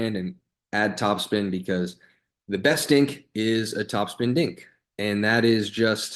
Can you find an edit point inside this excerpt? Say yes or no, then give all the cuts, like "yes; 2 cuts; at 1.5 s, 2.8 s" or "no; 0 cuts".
no; 0 cuts